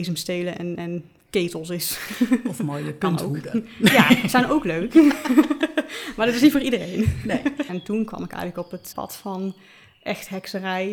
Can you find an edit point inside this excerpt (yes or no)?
yes